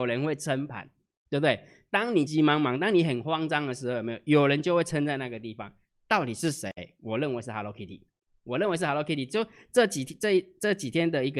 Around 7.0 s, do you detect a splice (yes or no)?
no